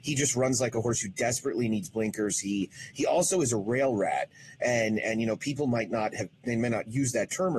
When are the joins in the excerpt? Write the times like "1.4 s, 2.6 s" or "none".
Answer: none